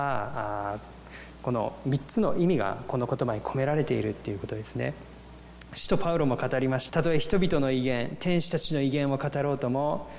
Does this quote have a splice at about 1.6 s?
no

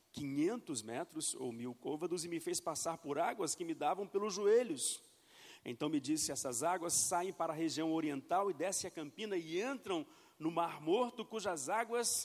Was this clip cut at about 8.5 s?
no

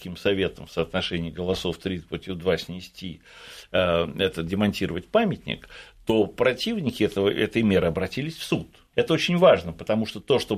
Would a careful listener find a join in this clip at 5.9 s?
no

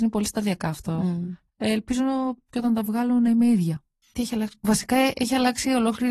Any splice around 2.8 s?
no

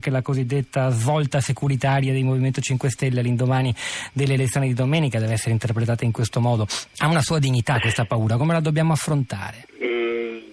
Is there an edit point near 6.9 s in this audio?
yes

